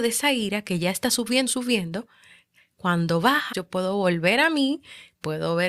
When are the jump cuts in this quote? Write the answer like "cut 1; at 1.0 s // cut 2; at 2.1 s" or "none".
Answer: cut 1; at 1.5 s // cut 2; at 3.5 s